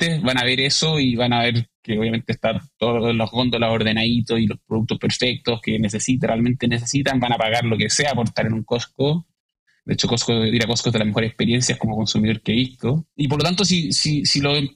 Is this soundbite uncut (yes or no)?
no